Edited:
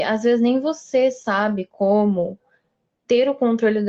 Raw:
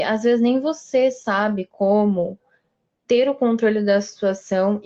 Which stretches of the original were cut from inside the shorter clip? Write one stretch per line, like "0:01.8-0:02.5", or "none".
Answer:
none